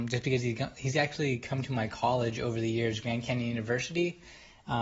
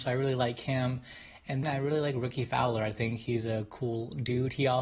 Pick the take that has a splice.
second; 1 cut; at 1.6 s

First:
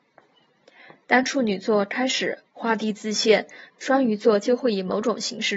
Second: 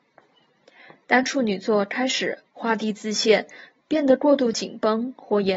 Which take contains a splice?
first; 1 cut; at 3.7 s

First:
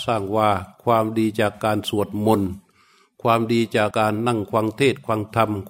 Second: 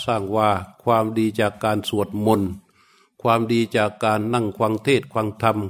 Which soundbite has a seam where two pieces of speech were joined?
first; 1 cut; at 3.9 s

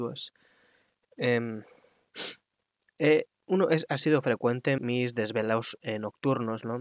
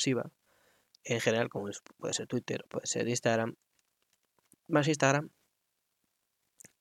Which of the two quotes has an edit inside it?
first; 1 cut; at 4.8 s

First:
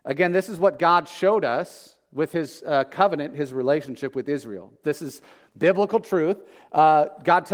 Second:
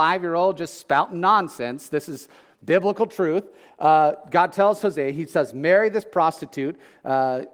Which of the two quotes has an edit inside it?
first; 1 cut; at 4.8 s

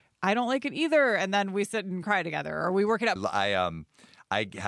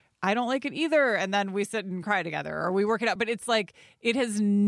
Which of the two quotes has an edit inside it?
first; 1 cut; at 3.2 s

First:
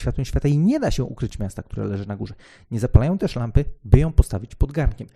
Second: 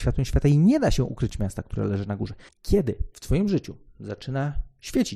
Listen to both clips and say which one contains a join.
second; 1 cut; at 2.5 s

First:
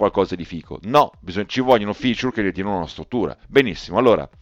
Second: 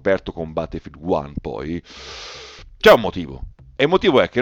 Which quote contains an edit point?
first; 1 cut; at 3.4 s

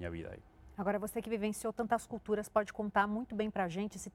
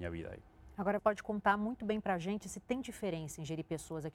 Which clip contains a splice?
second; 1 cut; at 1.0 s

